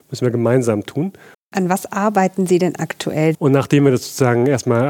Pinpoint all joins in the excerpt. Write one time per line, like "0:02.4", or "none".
0:01.3
0:03.3